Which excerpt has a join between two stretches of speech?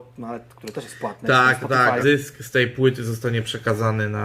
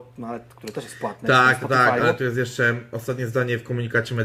first; 1 cut; at 2.0 s

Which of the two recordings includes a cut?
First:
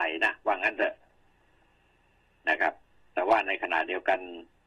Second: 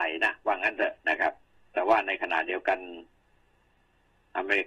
second; 1 cut; at 1.0 s

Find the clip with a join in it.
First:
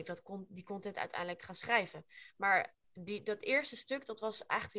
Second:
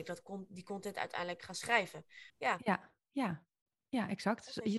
second; 1 cut; at 2.3 s

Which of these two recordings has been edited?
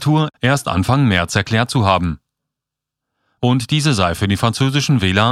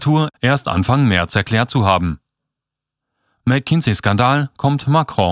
first; 1 cut; at 3.4 s

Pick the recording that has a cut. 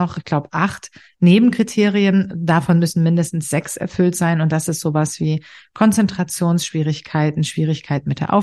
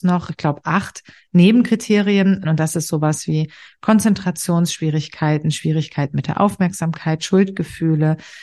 second; 1 cut; at 2.4 s

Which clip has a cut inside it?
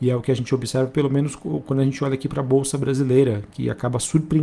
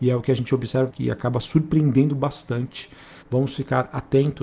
second; 2 cuts; at 0.9 s, 3.2 s

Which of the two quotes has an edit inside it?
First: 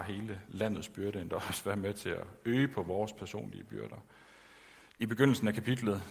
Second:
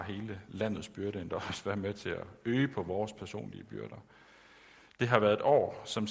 first; 1 cut; at 4.9 s

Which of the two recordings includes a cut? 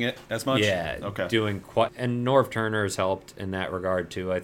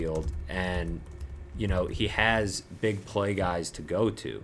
first; 1 cut; at 1.9 s

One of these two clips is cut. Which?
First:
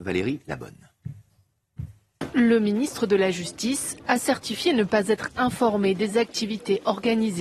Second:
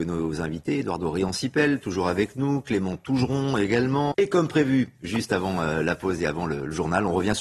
second; 1 cut; at 4.1 s

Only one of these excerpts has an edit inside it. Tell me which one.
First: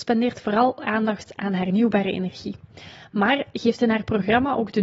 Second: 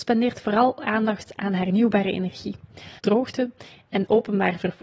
second; 1 cut; at 3.0 s

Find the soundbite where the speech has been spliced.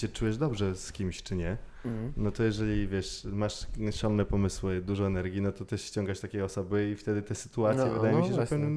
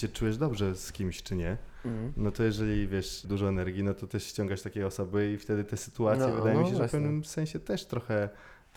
second; 1 cut; at 3.2 s

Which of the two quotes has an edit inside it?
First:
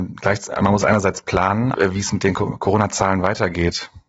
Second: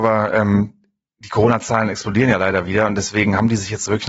first; 1 cut; at 1.7 s

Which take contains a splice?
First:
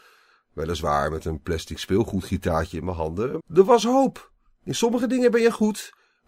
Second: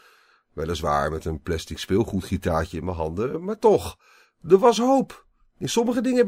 first; 1 cut; at 3.4 s

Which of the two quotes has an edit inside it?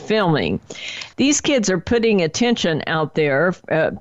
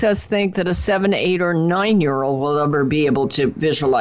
first; 1 cut; at 1.1 s

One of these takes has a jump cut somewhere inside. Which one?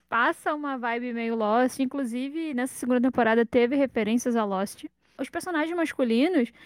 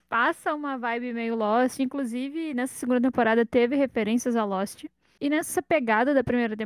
first; 1 cut; at 5.2 s

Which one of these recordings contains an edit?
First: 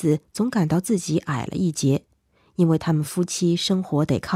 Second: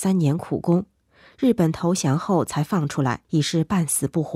second; 1 cut; at 3.2 s

